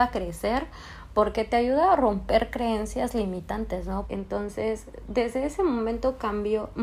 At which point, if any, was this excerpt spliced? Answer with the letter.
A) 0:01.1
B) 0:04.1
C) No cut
B